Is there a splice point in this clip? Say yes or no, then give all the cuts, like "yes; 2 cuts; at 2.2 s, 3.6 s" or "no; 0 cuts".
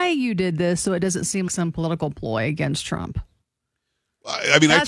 yes; 1 cut; at 1.5 s